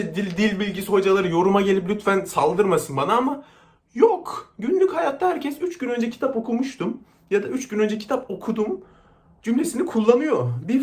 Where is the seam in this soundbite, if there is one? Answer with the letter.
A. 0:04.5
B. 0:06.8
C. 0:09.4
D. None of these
D